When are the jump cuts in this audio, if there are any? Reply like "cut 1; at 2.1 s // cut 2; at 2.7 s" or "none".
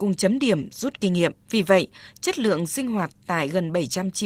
cut 1; at 1.4 s